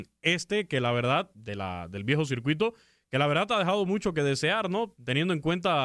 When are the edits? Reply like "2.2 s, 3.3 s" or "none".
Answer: none